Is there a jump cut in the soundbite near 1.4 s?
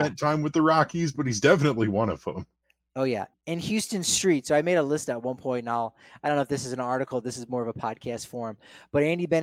no; 1 cut; at 3.3 s

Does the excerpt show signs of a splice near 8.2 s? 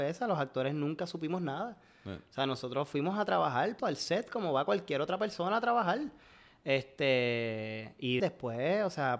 yes; 2 cuts; at 3.8 s, 8.2 s

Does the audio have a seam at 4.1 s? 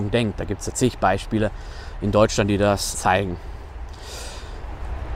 no; 1 cut; at 2.9 s

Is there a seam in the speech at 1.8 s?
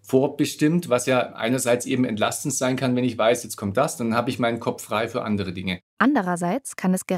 no; 2 cuts; at 3.4 s, 5.9 s

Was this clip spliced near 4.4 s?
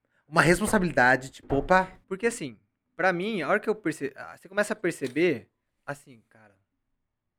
no; 1 cut; at 2.0 s

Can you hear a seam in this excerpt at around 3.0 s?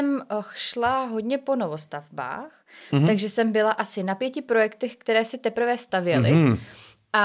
no; 0 cuts

